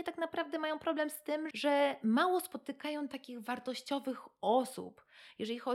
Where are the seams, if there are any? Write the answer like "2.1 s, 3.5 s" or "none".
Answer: 1.5 s